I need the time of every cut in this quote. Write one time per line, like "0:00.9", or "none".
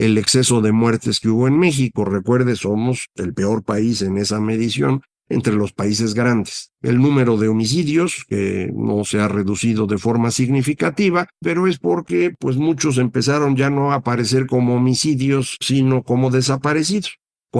0:06.7
0:11.4